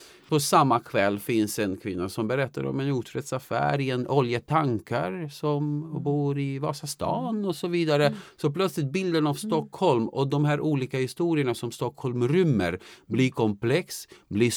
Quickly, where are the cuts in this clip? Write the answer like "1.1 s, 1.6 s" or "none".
none